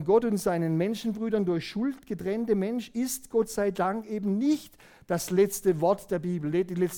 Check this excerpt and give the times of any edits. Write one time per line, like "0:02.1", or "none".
none